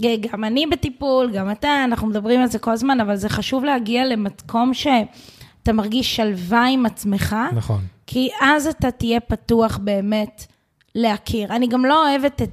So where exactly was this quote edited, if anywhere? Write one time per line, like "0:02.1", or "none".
none

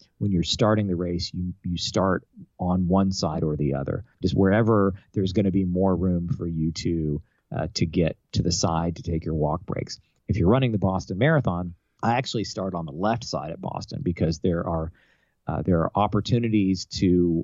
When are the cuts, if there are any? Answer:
0:04.2

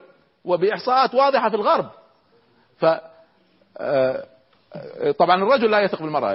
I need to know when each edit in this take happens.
none

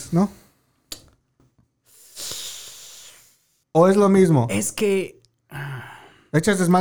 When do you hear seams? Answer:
0:01.4
0:03.6

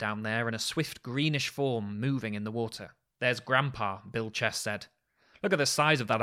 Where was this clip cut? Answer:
none

